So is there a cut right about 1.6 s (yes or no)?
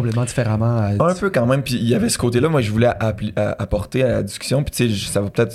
no